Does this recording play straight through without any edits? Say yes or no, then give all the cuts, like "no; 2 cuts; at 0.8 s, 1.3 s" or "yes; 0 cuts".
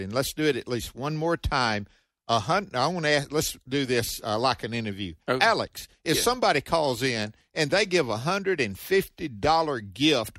yes; 0 cuts